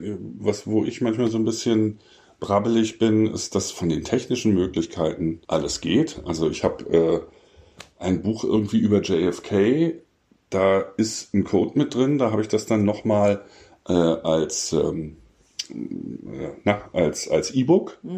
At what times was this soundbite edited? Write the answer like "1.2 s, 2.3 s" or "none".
5.4 s

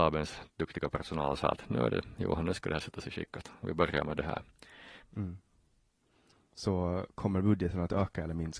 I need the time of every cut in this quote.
5.0 s

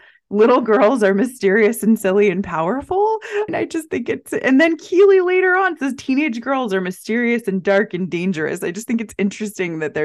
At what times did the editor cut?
3.5 s

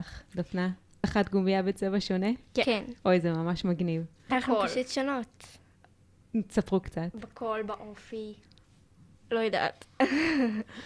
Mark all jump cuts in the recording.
1.0 s, 4.3 s

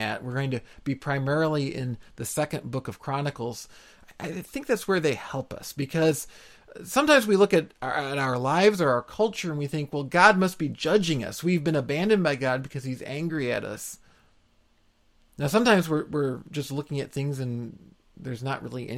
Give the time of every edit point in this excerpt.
none

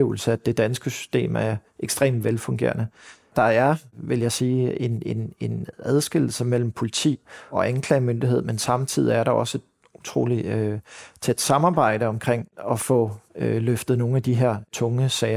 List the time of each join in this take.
13.3 s

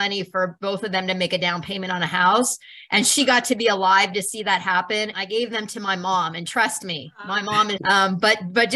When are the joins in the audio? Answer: 5.1 s, 7.8 s

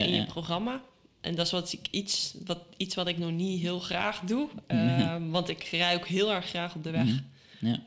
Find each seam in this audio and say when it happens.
none

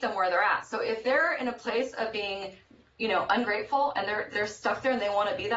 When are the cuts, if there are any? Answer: none

